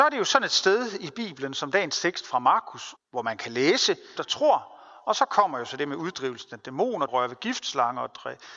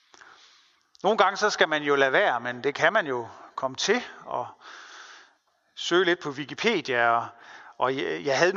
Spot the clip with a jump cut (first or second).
first